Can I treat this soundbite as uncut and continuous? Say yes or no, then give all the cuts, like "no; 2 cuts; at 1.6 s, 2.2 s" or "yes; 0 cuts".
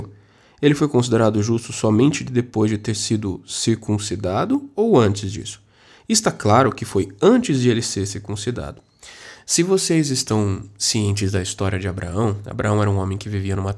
yes; 0 cuts